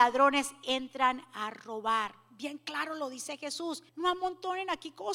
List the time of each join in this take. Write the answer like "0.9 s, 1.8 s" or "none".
3.9 s